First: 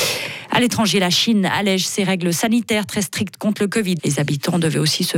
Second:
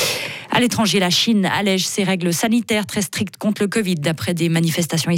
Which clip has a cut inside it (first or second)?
first